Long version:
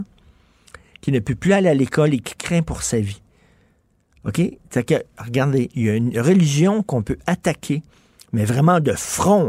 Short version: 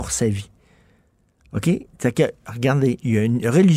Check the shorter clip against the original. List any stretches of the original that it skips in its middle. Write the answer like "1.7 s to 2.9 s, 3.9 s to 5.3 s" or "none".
none